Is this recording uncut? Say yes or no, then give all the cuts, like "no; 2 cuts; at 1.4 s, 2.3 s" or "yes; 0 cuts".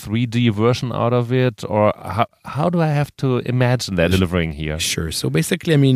no; 1 cut; at 4.1 s